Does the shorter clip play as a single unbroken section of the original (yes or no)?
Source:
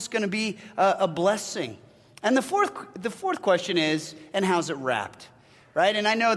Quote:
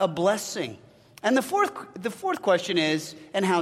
yes